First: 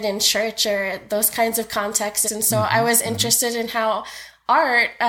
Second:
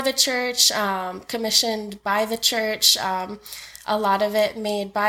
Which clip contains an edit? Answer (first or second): first